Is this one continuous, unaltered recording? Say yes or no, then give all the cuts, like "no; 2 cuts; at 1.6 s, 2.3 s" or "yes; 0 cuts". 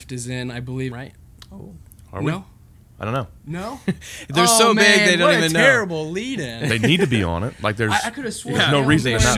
no; 1 cut; at 0.9 s